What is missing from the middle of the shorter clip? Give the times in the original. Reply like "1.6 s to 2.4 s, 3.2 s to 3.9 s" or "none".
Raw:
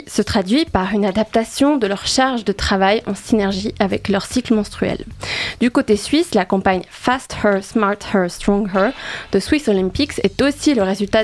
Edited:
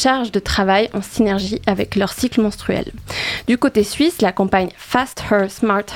none